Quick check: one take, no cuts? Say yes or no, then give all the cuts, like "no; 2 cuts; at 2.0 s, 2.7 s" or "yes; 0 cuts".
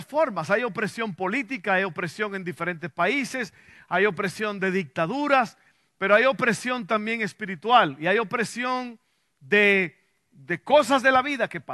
yes; 0 cuts